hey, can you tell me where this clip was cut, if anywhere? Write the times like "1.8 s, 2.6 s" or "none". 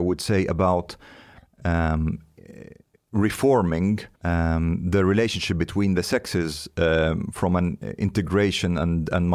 4.1 s